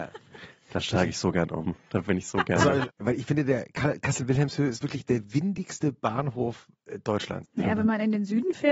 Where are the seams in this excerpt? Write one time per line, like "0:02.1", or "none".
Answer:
0:02.9
0:07.4